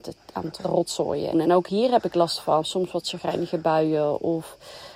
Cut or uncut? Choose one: cut